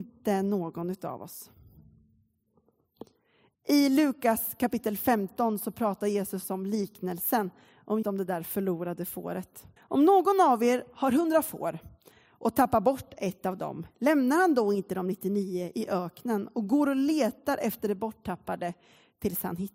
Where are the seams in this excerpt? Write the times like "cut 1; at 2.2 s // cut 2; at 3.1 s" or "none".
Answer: cut 1; at 8.0 s // cut 2; at 9.8 s